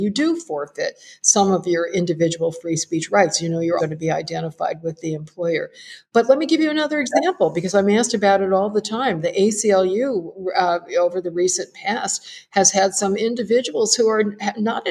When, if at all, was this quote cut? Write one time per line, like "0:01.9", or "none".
0:03.8